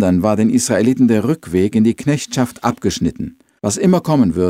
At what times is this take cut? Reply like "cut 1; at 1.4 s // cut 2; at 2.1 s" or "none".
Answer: cut 1; at 3.6 s